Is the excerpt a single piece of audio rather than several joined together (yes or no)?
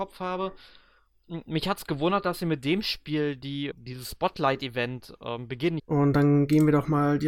no